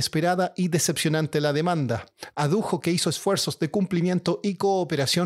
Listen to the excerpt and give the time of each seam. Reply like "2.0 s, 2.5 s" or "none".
none